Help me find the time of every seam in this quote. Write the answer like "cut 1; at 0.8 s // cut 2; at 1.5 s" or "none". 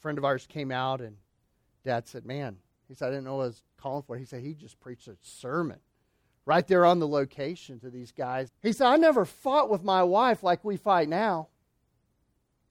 cut 1; at 8.5 s